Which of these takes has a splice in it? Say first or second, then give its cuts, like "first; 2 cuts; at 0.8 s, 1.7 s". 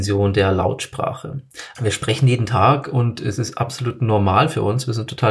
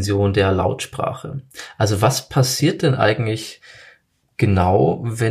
first; 1 cut; at 1.8 s